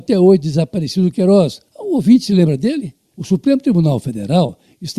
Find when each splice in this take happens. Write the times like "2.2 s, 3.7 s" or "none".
1.7 s, 3.1 s

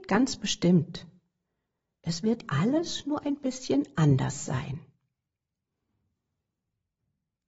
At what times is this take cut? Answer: 2.4 s

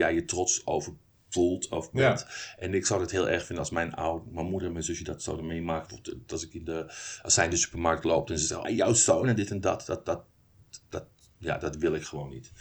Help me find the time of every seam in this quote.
8.6 s

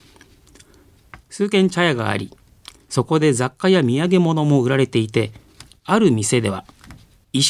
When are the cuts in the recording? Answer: none

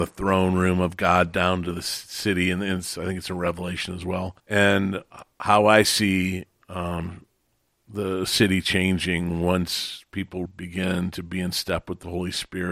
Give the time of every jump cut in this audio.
4.4 s, 10.4 s

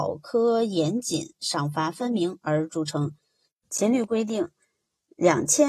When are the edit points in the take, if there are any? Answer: 3.5 s

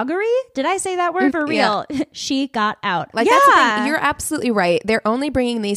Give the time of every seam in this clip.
1.3 s, 3.1 s

